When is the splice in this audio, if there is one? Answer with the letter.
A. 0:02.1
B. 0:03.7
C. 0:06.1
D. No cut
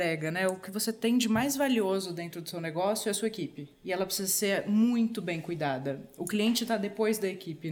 B